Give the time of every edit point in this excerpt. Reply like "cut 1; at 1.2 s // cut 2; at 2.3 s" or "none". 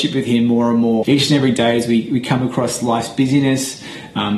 cut 1; at 1.0 s